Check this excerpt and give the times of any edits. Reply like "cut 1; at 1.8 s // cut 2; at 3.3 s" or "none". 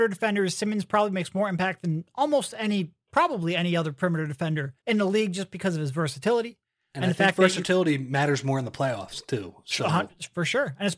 cut 1; at 4.8 s